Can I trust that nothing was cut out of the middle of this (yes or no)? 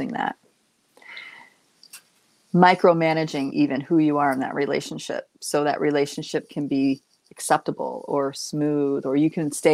no